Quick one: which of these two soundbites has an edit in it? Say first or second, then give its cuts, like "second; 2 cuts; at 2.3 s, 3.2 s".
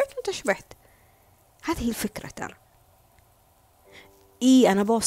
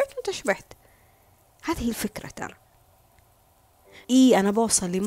second; 1 cut; at 4.0 s